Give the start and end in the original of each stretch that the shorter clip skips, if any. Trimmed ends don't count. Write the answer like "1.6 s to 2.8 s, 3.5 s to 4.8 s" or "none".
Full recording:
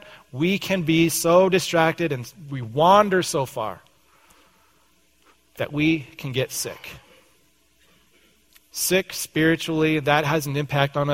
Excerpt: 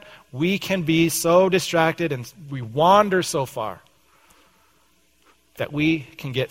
none